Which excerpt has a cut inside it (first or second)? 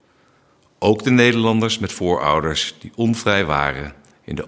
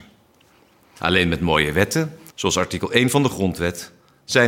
second